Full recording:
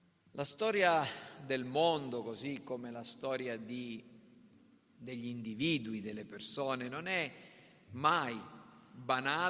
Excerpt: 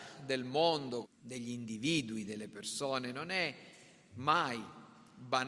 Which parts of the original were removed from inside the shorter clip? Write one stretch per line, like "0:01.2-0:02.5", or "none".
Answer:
0:02.2-0:04.8